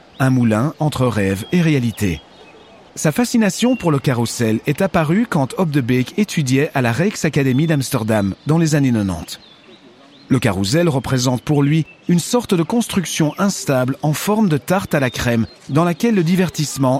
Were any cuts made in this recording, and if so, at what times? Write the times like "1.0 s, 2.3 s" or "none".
2.9 s

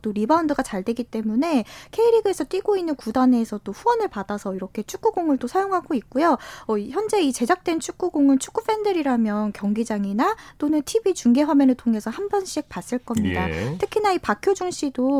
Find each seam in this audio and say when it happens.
none

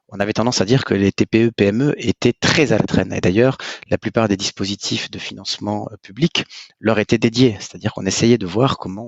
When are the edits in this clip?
none

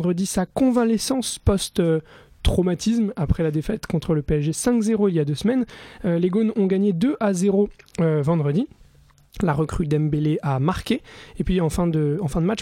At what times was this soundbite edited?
none

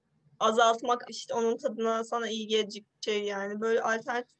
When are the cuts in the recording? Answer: 1.0 s

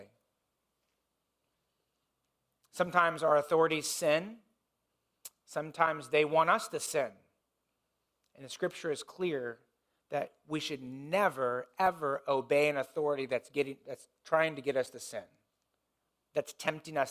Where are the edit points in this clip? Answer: none

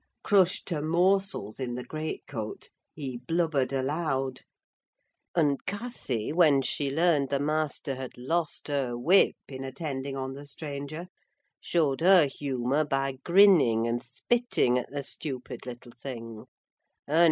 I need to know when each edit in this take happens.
none

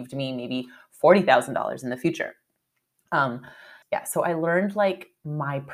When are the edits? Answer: 3.8 s

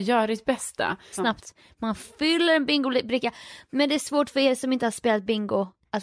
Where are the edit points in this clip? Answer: 1.1 s

